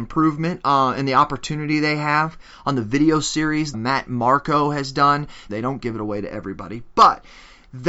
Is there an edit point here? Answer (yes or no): yes